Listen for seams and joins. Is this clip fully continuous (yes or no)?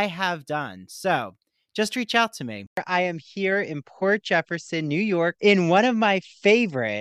no